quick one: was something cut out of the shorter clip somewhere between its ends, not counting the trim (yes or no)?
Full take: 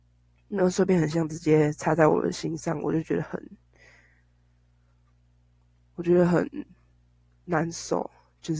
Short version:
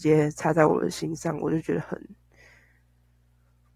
no